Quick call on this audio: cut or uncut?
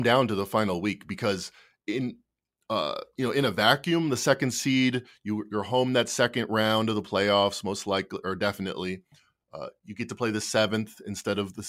uncut